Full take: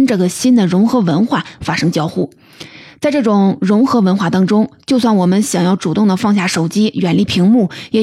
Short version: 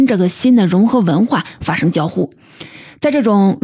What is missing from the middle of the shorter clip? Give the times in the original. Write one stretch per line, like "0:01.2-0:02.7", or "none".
none

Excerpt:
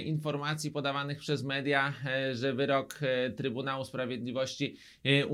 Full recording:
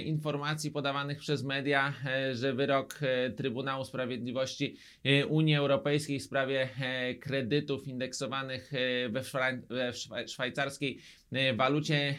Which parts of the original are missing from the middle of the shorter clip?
none

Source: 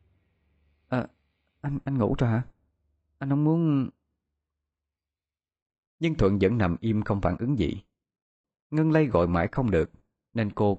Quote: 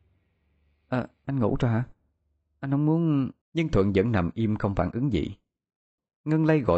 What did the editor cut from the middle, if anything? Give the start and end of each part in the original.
0:01.2-0:01.8
0:04.0-0:05.9

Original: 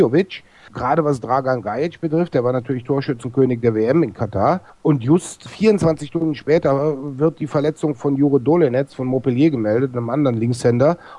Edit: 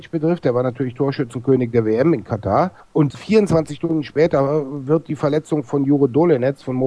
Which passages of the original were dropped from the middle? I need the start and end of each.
0:05.0-0:05.4

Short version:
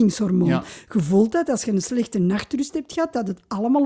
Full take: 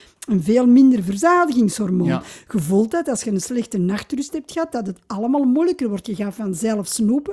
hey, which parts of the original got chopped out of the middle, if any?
none

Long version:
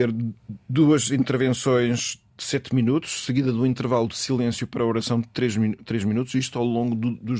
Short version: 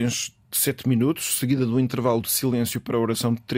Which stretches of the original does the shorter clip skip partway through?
none

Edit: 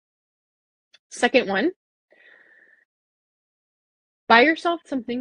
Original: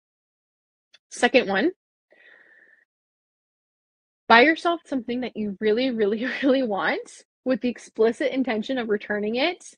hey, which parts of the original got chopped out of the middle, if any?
none

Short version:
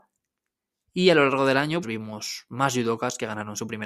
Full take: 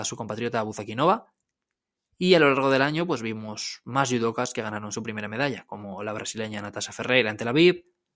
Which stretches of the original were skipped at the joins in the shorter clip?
0:03.1-0:03.2

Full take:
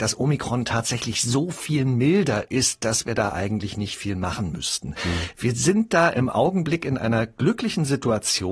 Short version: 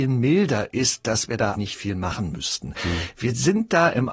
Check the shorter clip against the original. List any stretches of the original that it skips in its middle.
0:03.3-0:03.7

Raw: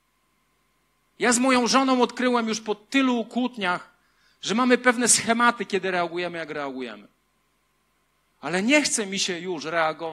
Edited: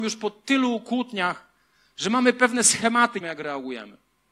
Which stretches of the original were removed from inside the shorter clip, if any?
0:05.6-0:06.3

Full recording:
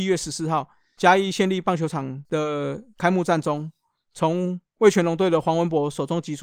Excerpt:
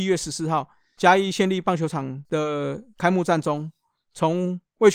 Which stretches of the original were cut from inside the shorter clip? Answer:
none

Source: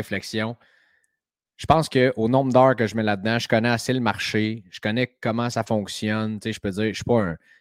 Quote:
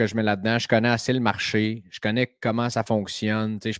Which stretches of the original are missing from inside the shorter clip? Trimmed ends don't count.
none

